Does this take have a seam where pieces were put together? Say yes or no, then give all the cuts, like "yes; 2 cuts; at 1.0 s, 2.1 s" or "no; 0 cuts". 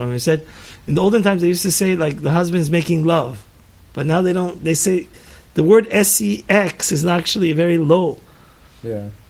no; 0 cuts